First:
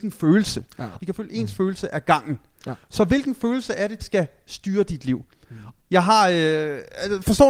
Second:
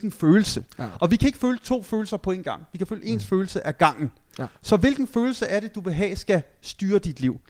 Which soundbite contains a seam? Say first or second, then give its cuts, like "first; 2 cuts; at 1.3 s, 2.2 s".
first; 3 cuts; at 1.0 s, 4.0 s, 5.8 s